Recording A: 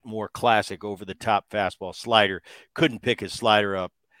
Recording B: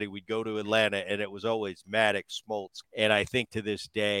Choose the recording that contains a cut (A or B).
B